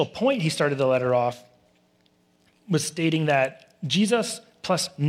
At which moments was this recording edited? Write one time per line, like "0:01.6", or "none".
none